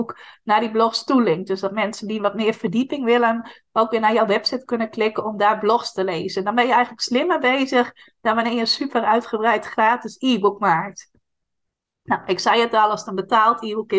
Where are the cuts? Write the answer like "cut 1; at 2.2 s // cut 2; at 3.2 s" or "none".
none

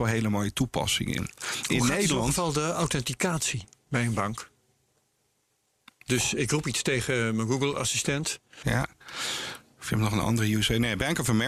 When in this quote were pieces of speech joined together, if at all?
cut 1; at 6.4 s // cut 2; at 8.6 s

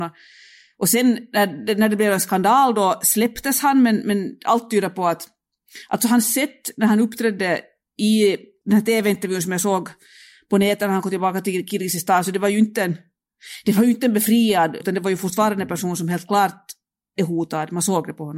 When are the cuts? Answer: cut 1; at 14.8 s

